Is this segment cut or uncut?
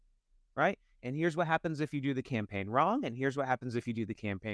uncut